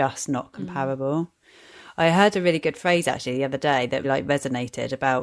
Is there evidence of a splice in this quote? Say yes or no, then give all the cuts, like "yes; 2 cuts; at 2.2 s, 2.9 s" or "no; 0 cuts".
yes; 1 cut; at 4.0 s